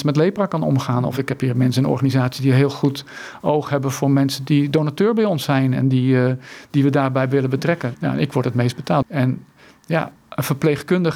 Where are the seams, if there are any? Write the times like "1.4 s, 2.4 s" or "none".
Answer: 7.9 s, 9.0 s